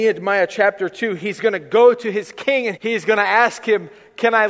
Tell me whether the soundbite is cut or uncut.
cut